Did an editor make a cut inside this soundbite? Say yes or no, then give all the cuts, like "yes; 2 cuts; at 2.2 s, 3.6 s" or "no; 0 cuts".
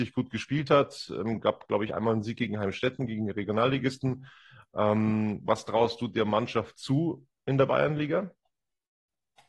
no; 0 cuts